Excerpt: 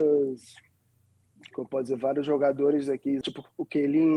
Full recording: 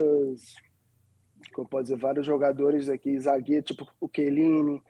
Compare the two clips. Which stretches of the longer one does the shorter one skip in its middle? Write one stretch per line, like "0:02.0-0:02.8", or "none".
0:03.2-0:03.6